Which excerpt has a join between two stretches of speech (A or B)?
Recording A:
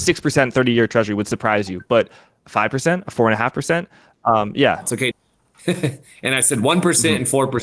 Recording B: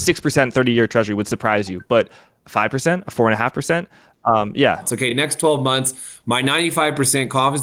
A